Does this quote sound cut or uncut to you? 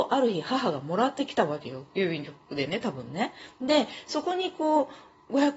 uncut